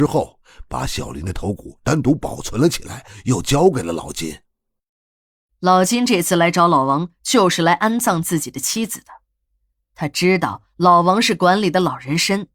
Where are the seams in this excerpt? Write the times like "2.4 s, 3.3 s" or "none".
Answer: none